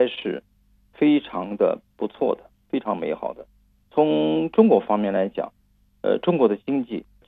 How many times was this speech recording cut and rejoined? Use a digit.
0